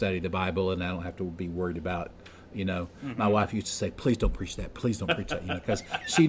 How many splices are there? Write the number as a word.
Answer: zero